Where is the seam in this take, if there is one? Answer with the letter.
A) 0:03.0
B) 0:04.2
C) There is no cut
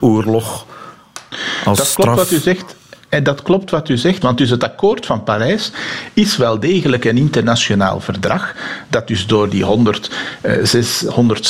B